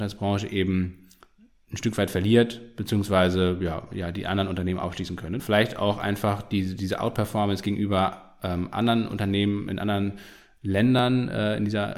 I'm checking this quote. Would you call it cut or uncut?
cut